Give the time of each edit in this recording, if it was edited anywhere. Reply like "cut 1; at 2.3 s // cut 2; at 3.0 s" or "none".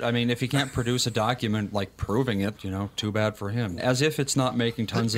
cut 1; at 2.5 s // cut 2; at 3.8 s

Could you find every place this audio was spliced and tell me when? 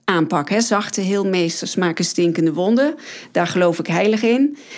none

